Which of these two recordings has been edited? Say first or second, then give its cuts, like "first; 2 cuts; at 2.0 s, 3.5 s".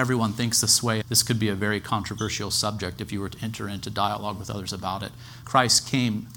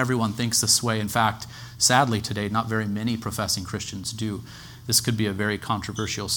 first; 2 cuts; at 1.0 s, 5.4 s